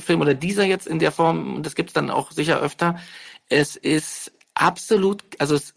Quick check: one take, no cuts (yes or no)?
yes